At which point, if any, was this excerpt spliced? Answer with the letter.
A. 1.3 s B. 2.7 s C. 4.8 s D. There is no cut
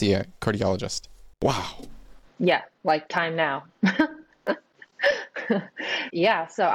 A